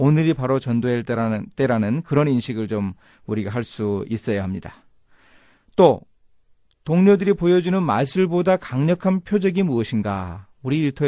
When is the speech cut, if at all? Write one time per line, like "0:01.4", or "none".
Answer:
none